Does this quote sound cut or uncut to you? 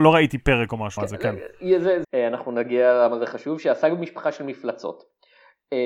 cut